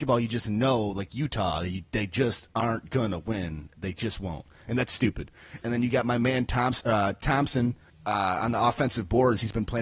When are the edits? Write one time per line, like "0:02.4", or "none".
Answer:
0:05.6
0:07.9